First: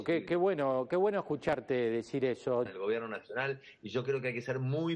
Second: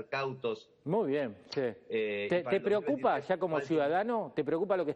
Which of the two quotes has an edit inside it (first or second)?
first